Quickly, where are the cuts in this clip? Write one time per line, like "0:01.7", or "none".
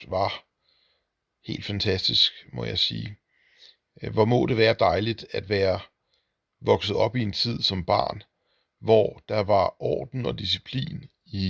none